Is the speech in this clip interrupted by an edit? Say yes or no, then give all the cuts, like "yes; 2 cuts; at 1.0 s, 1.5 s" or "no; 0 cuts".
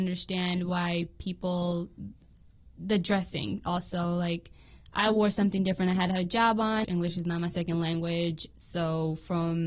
yes; 1 cut; at 6.8 s